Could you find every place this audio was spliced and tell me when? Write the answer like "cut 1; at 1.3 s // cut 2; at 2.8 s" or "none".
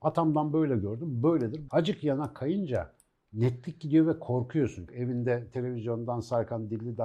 cut 1; at 1.7 s // cut 2; at 4.9 s